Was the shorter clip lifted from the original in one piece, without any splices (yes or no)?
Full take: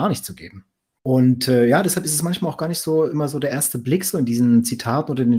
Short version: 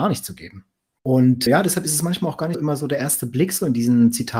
no